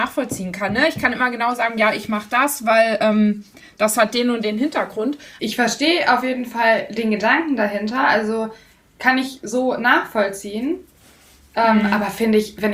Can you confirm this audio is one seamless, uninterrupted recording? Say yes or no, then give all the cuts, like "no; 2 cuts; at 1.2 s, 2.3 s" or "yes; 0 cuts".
no; 1 cut; at 5.4 s